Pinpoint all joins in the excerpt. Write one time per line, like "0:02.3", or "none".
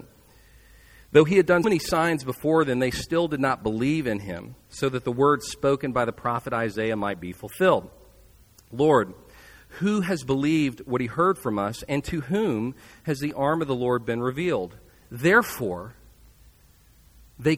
0:01.6

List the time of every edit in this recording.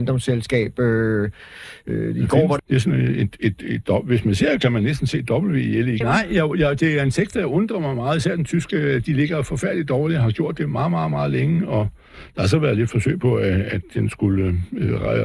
0:02.6
0:06.0

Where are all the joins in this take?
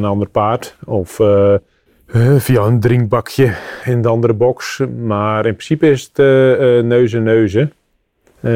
0:03.8

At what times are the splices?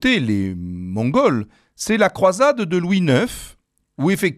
none

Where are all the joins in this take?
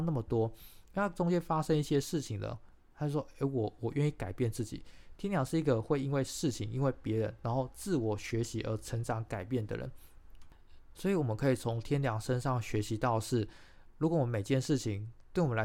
none

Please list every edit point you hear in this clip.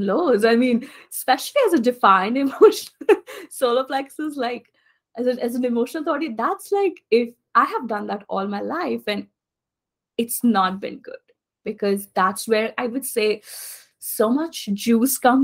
none

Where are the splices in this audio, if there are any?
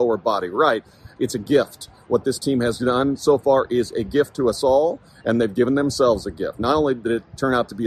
0:01.2

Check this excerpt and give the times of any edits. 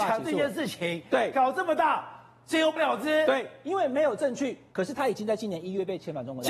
0:02.8
0:04.7

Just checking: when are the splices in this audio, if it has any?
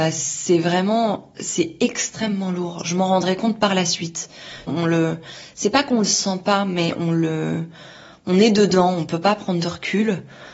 0:04.7

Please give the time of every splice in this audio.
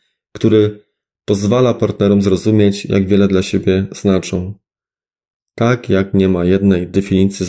0:05.4

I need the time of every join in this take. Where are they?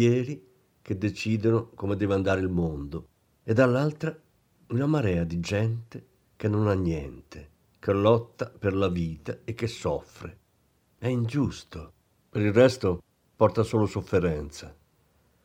0:12.2

